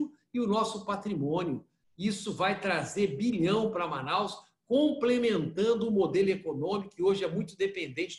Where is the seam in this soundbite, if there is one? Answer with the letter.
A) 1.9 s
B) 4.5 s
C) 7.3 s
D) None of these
D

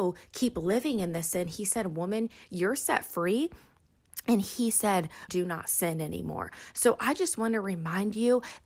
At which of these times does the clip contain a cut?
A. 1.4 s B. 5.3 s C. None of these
B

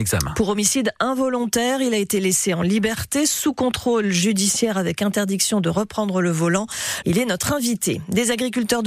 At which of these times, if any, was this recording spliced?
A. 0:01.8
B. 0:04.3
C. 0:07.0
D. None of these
C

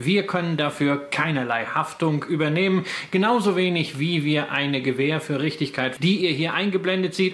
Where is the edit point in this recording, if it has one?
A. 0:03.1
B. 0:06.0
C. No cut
B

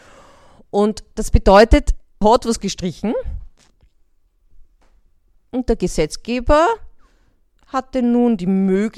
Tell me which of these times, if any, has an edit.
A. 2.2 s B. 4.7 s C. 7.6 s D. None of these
A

